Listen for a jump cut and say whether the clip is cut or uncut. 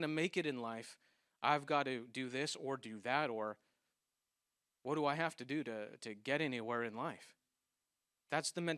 uncut